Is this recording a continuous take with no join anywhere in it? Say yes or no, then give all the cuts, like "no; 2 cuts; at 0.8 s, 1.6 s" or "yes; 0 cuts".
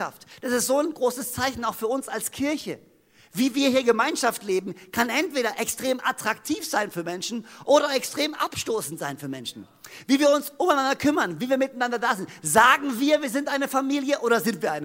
yes; 0 cuts